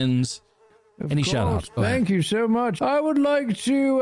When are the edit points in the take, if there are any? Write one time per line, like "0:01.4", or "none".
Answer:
0:01.7
0:02.8